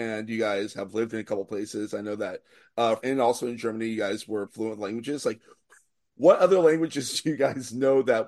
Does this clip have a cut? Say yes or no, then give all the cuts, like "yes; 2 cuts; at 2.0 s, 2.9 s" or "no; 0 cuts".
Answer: yes; 2 cuts; at 3.0 s, 4.5 s